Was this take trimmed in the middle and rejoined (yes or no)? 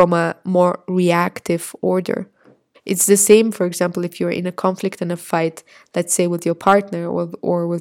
yes